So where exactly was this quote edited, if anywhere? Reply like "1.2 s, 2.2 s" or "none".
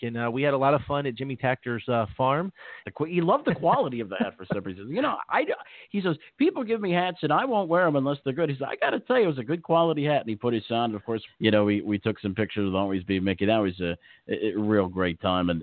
2.8 s, 11.3 s